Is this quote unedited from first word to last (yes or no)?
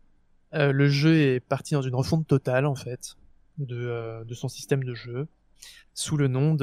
yes